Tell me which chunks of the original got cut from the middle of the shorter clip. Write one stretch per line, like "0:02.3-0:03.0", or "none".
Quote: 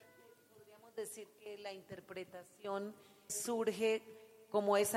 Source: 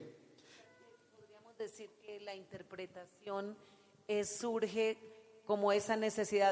0:03.9-0:04.2